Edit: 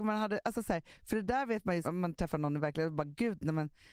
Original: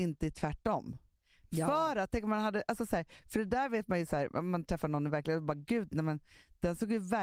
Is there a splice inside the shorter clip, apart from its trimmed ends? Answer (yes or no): yes